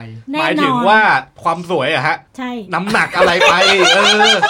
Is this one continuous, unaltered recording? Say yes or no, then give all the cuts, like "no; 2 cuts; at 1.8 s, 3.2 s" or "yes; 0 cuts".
no; 1 cut; at 2.3 s